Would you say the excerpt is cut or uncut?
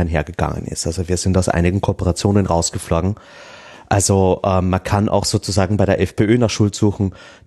uncut